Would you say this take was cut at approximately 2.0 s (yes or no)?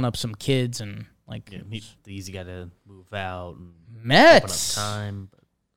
yes